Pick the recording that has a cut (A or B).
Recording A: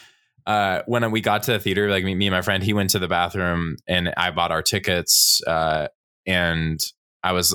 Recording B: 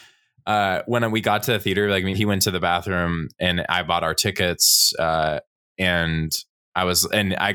B